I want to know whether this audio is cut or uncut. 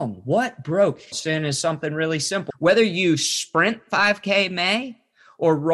cut